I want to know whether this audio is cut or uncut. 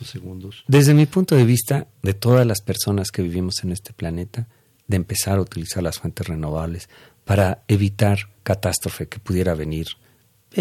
cut